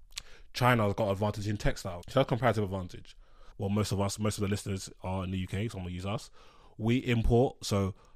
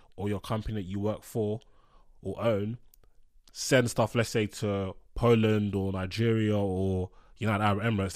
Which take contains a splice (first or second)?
first